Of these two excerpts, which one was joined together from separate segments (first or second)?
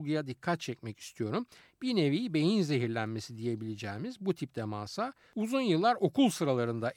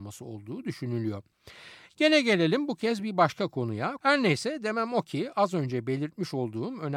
second